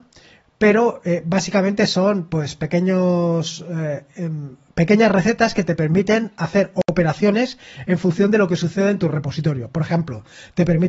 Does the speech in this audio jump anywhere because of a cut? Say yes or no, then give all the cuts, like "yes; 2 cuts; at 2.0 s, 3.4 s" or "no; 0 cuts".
no; 0 cuts